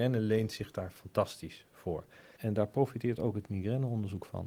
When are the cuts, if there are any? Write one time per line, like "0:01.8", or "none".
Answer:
0:02.4